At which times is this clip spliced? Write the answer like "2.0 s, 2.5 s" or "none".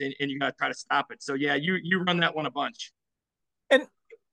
none